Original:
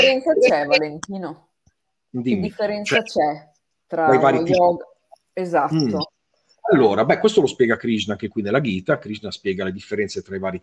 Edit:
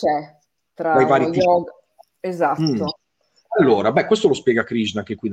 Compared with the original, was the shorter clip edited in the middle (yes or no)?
no